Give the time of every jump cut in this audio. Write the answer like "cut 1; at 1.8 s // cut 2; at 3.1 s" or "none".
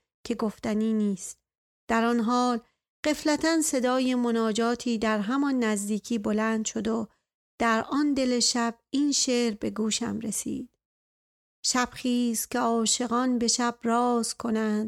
none